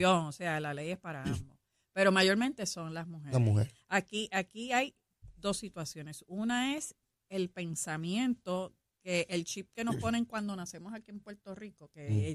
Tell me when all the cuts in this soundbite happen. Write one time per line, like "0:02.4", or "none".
none